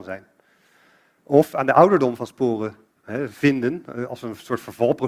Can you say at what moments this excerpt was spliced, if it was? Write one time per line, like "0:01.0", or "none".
none